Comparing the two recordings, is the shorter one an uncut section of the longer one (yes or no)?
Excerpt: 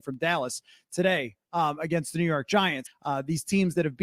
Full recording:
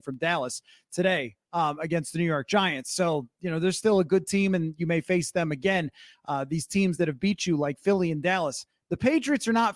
no